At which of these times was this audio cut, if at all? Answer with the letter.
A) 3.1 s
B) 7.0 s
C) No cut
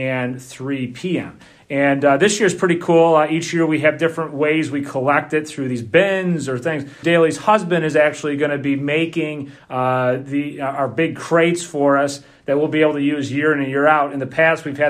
B